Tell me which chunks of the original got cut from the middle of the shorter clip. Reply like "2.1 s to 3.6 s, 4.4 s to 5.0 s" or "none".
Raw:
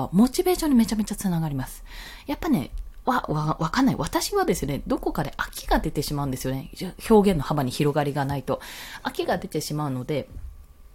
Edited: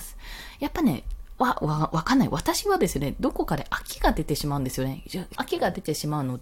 7.0 s to 9.0 s

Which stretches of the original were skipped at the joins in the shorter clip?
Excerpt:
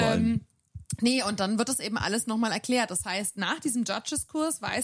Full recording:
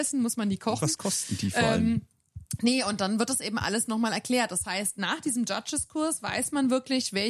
none

